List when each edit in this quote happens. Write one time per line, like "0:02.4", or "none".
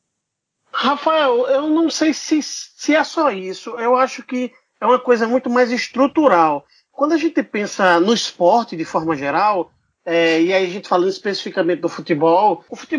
none